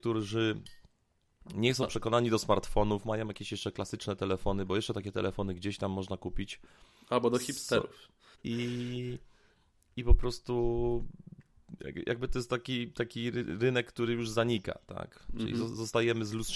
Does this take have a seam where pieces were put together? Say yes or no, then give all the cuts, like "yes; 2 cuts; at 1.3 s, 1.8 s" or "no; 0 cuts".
yes; 1 cut; at 8.3 s